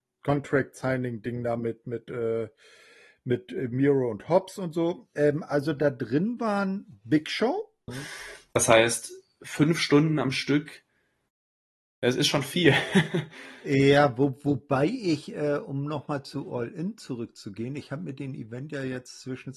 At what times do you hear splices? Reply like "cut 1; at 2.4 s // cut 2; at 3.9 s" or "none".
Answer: cut 1; at 7.9 s